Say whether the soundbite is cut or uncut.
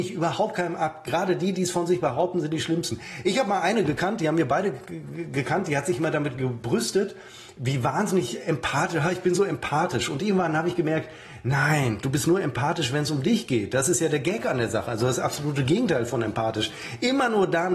uncut